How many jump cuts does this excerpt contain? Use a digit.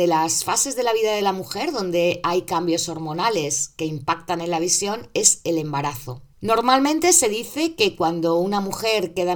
1